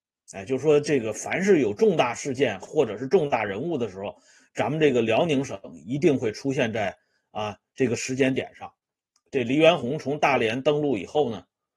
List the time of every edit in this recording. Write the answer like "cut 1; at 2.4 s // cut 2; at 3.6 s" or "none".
none